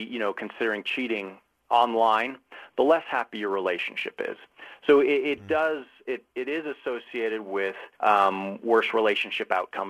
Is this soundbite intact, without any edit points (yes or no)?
no